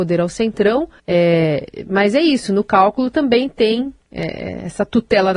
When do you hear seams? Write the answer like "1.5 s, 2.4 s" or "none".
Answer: 1.0 s